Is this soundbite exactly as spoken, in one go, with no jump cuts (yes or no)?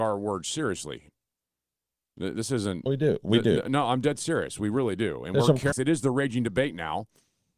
no